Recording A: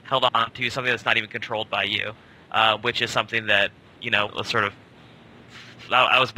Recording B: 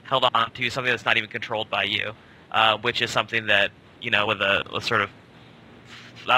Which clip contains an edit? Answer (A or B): A